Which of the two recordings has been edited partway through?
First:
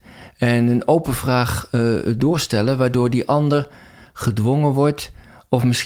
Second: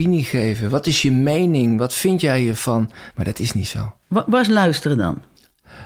second; 1 cut; at 3.1 s

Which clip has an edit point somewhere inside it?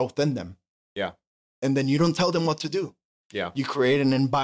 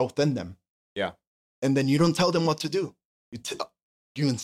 first; 1 cut; at 3.2 s

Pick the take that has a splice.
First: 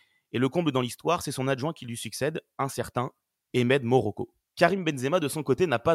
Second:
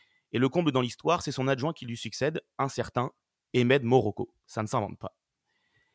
first; 1 cut; at 4.4 s

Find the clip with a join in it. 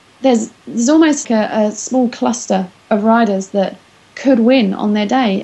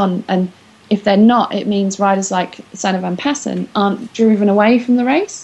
first; 1 cut; at 1.2 s

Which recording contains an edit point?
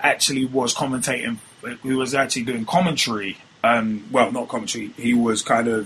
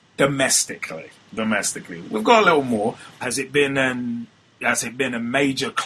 second; 2 cuts; at 1.2 s, 3.2 s

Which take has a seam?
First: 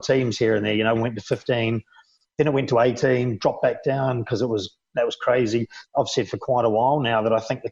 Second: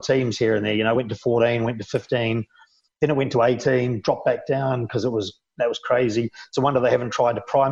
first; 2 cuts; at 1.0 s, 5.8 s

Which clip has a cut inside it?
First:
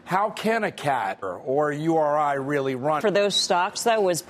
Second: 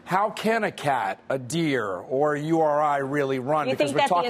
first; 2 cuts; at 1.2 s, 3.0 s

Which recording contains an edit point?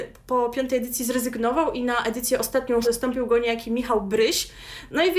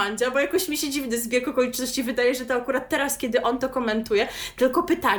first; 1 cut; at 2.8 s

